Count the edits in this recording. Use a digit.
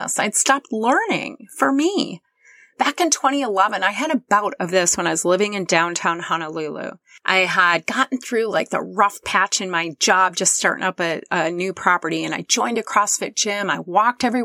0